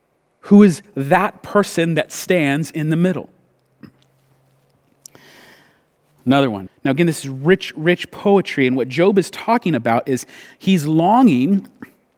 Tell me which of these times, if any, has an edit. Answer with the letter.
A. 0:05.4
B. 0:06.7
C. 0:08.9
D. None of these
B